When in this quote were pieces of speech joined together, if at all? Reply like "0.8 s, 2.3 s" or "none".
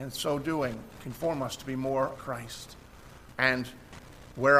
2.1 s, 3.3 s

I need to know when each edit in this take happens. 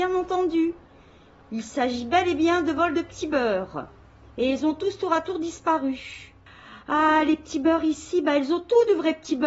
none

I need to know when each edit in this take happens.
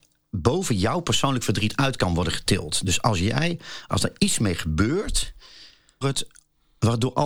3.9 s, 6.0 s

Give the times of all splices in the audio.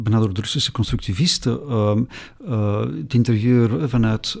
none

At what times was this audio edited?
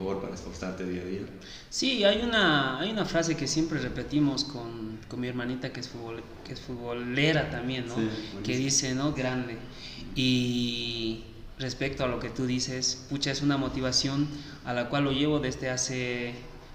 9.1 s

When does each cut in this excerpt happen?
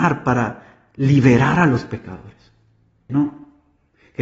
3.1 s

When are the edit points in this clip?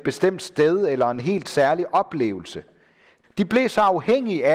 3.2 s

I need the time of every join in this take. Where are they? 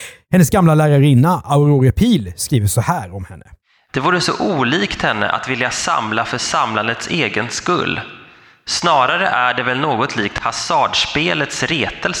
3.9 s

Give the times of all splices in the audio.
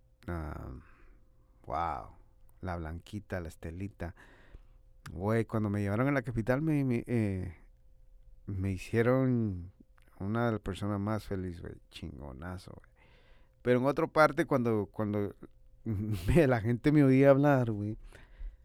none

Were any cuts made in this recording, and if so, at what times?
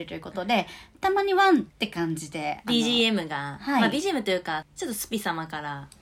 1.7 s, 4.6 s

